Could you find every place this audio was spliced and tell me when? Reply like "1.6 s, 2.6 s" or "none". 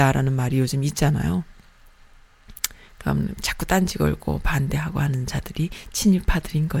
none